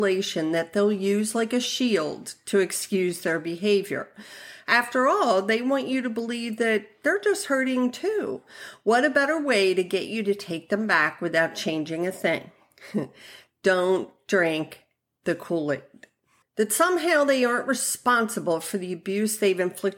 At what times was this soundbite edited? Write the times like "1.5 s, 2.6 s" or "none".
16.4 s